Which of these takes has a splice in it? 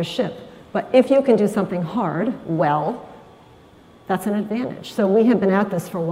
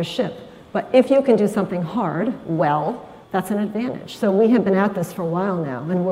second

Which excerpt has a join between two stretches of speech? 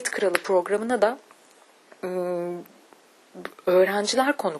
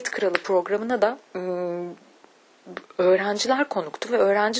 second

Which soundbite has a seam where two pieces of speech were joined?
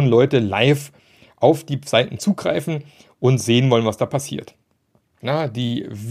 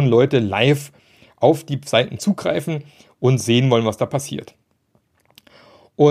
first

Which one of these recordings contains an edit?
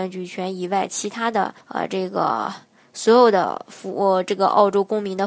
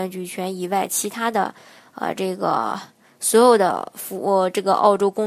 first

